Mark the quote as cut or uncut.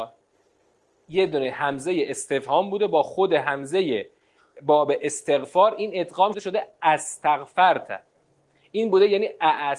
cut